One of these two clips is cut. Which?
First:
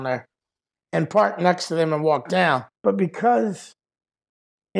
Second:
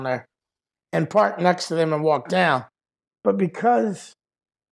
first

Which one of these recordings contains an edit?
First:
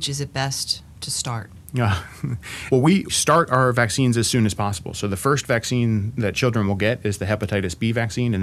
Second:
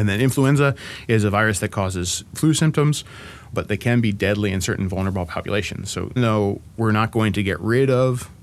second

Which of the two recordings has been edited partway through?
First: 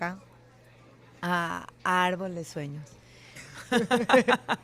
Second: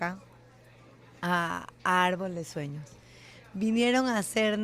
first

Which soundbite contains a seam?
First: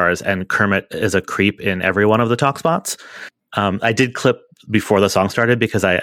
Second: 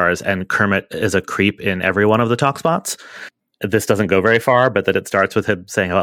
first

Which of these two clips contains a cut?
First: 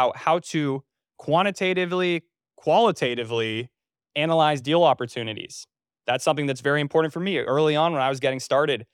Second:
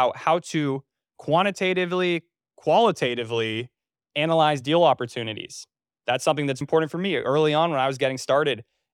second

